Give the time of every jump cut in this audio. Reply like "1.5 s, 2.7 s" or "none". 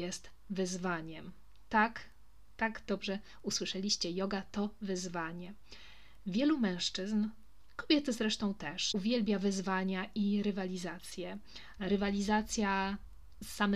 8.9 s, 11.8 s